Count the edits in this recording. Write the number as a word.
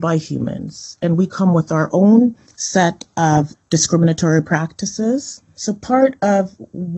one